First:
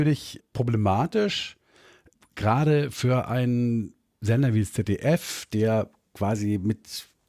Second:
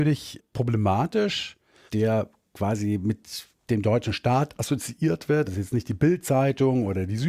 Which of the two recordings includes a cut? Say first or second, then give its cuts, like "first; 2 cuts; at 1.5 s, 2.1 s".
second; 2 cuts; at 1.9 s, 5.5 s